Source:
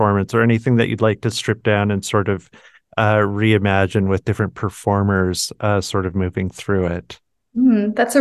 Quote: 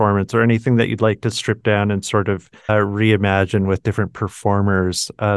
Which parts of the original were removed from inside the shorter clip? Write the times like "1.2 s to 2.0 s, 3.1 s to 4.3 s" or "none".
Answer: 2.7 s to 3.1 s